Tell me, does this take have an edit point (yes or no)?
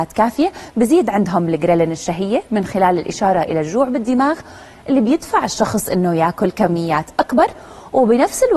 no